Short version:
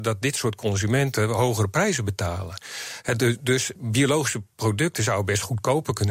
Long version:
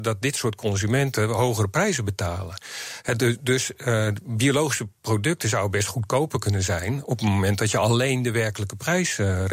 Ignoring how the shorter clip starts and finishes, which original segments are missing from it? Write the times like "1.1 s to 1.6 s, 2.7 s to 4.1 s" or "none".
3.8 s to 4.2 s